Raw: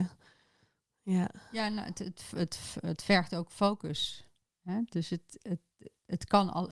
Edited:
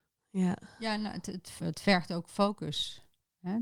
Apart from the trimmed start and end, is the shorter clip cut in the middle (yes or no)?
yes